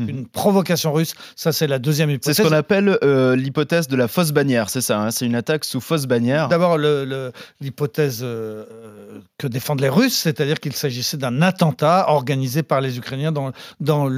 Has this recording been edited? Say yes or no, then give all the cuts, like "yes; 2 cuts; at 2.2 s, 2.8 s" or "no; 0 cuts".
yes; 1 cut; at 6.5 s